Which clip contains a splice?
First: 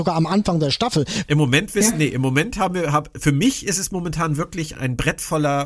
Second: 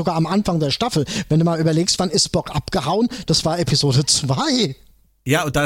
first; 2 cuts; at 1.3 s, 4.7 s

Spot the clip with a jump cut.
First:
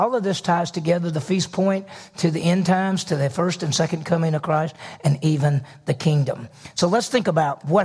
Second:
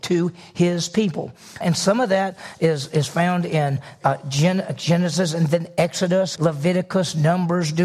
second; 2 cuts; at 1.6 s, 6.4 s

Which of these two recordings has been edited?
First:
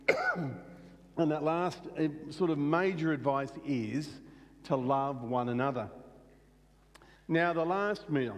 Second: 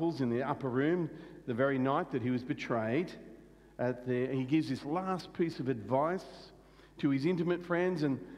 first; 1 cut; at 7.2 s

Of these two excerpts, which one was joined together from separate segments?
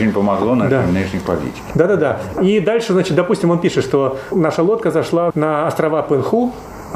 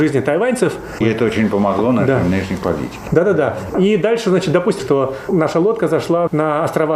second; 2 cuts; at 1.0 s, 4.8 s

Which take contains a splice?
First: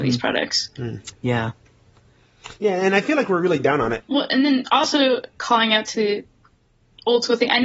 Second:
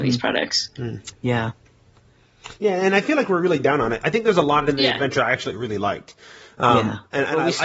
first; 2 cuts; at 4.0 s, 5.3 s

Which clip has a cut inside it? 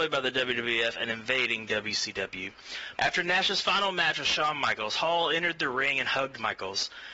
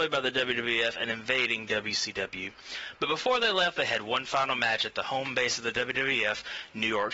first; 1 cut; at 3.0 s

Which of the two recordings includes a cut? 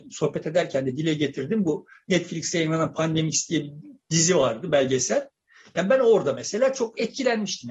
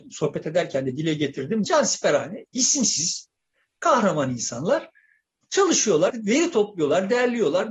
second; 2 cuts; at 1.6 s, 6.1 s

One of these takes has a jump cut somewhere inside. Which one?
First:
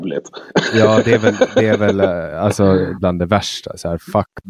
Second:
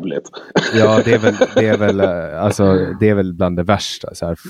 first; 1 cut; at 3.0 s

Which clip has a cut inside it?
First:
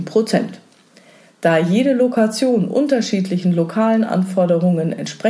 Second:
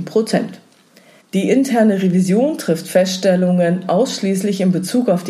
second; 1 cut; at 1.2 s

